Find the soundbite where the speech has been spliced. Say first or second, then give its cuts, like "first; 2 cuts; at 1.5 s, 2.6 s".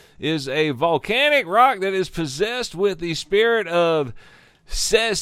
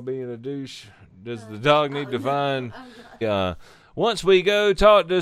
second; 1 cut; at 3.2 s